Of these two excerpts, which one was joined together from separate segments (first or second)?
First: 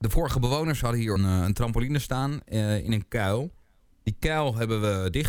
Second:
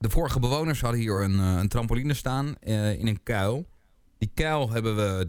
first